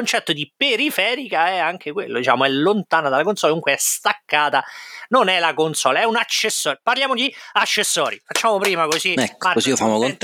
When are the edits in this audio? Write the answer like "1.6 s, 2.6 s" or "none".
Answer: none